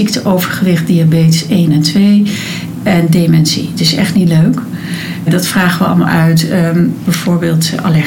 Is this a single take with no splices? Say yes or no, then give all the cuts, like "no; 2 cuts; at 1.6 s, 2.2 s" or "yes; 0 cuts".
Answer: no; 2 cuts; at 5.3 s, 7.0 s